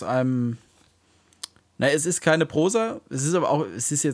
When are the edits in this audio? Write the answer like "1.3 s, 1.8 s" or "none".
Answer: none